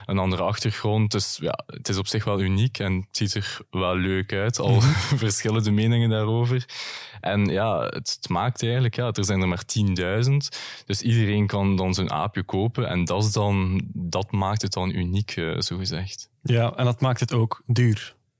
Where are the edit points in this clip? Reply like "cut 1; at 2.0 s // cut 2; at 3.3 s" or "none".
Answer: none